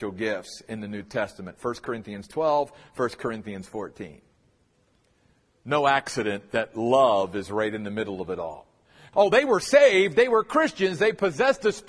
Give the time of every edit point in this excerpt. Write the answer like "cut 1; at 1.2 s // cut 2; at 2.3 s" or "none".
cut 1; at 9.1 s